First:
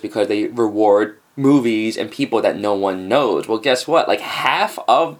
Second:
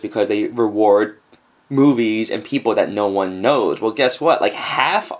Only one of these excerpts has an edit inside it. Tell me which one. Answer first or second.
first